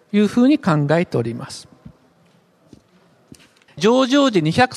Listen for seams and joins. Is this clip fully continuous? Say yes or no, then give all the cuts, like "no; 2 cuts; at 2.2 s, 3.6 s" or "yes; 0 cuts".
no; 1 cut; at 3.7 s